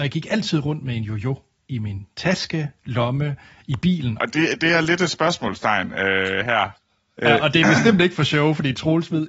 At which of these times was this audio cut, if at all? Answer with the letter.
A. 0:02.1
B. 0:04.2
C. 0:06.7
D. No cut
B